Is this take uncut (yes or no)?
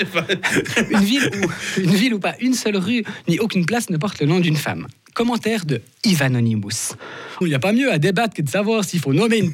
no